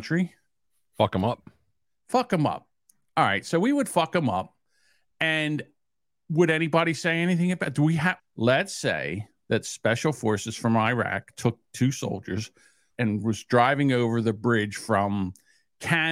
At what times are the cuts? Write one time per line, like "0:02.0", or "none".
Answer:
0:08.2
0:12.9